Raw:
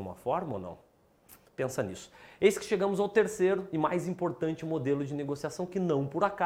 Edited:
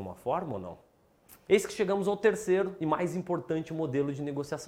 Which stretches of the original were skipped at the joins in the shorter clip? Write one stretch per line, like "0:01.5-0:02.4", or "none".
0:01.5-0:02.4